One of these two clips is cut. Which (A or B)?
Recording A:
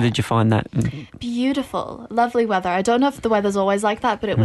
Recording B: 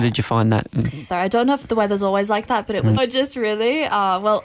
B